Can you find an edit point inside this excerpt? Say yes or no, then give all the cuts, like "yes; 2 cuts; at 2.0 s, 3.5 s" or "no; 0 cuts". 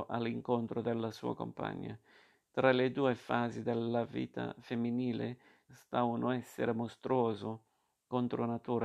yes; 1 cut; at 5.7 s